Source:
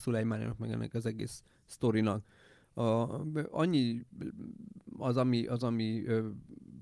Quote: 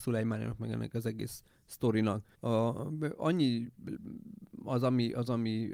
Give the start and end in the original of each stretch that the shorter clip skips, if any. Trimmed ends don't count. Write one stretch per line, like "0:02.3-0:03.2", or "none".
0:02.4-0:02.7